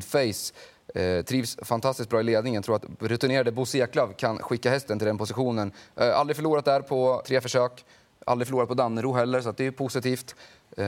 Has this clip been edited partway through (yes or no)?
yes